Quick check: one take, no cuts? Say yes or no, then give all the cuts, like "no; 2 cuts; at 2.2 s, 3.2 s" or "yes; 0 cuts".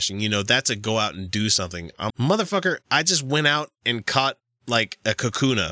no; 1 cut; at 2.1 s